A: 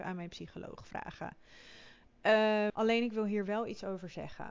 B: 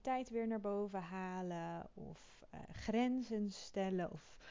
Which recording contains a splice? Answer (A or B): A